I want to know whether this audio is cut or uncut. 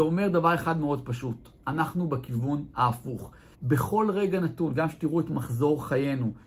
cut